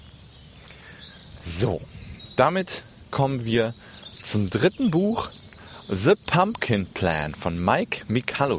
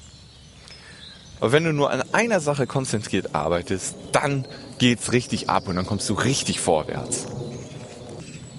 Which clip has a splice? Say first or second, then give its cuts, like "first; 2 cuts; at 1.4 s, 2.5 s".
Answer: second; 1 cut; at 1.4 s